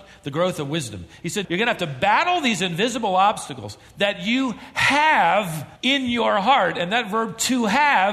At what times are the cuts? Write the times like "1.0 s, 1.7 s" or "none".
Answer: 1.4 s, 5.8 s